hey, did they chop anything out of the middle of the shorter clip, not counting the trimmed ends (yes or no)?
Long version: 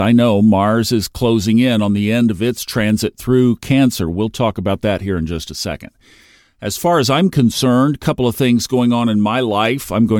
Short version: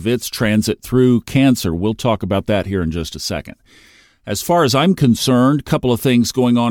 no